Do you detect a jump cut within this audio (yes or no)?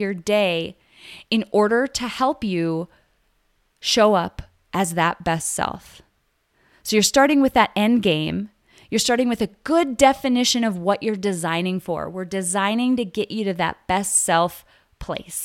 no